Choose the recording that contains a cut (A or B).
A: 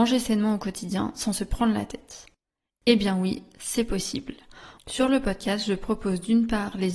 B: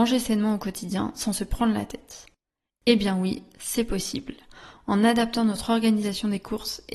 A